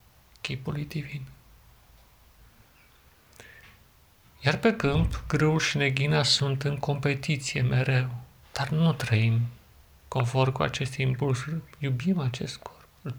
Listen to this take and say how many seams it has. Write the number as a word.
one